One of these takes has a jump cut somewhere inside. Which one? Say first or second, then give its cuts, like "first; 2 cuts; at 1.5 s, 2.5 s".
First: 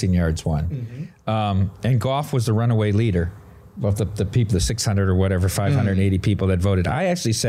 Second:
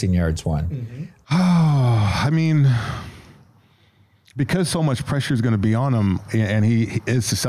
second; 1 cut; at 1.2 s